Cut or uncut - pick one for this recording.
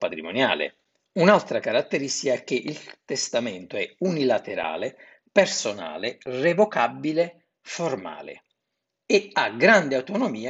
uncut